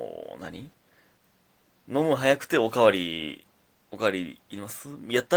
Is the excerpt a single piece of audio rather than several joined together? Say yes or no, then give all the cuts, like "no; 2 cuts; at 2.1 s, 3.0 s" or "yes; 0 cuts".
no; 1 cut; at 3.6 s